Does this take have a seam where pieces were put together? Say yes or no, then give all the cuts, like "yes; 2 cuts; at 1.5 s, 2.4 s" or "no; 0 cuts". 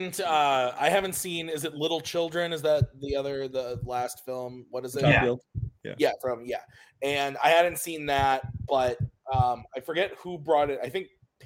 no; 0 cuts